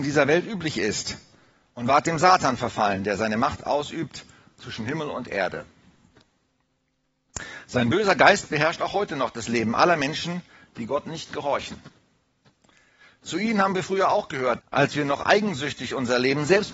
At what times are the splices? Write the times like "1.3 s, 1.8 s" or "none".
14.6 s

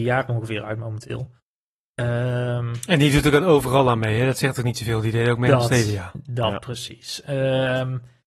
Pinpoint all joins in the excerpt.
none

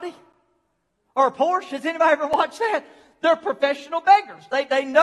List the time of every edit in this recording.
none

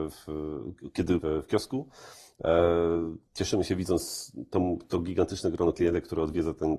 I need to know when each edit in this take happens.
1.2 s, 3.3 s

